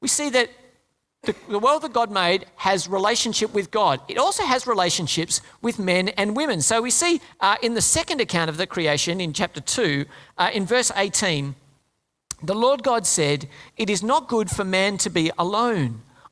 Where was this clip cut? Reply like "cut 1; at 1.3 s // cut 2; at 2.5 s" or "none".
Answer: none

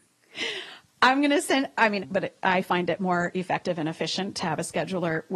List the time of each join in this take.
cut 1; at 2.0 s

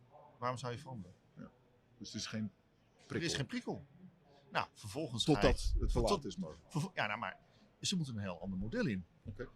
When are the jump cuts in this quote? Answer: none

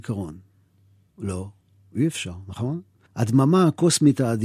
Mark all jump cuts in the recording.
cut 1; at 1.1 s // cut 2; at 3.1 s

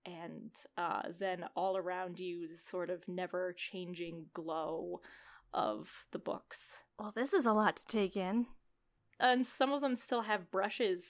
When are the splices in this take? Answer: cut 1; at 6.9 s // cut 2; at 9.2 s

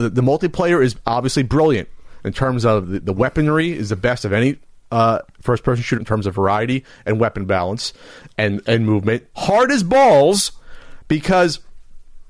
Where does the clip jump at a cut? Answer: cut 1; at 6.0 s // cut 2; at 9.3 s

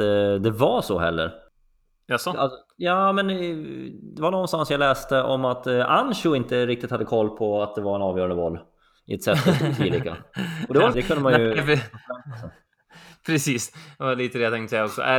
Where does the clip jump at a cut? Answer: cut 1; at 10.9 s

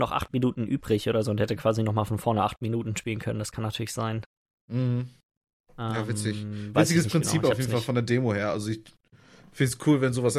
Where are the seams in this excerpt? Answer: none

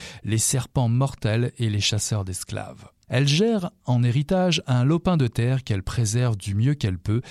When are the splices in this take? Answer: cut 1; at 3.1 s

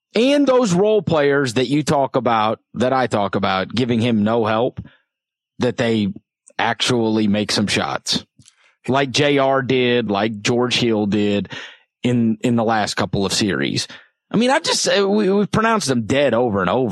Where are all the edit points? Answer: cut 1; at 10.1 s

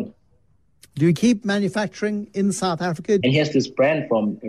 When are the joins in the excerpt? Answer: cut 1; at 3.2 s

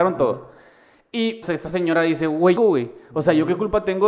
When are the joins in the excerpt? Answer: cut 1; at 1.4 s // cut 2; at 2.6 s

